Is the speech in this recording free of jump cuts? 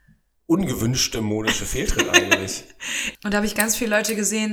no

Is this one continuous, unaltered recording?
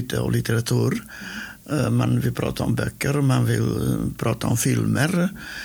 yes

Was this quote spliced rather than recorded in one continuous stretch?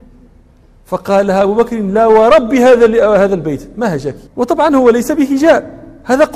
yes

